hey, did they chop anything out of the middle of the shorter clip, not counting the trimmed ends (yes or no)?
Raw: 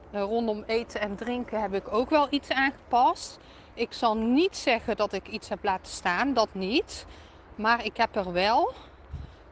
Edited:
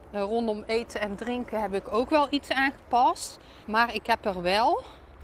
yes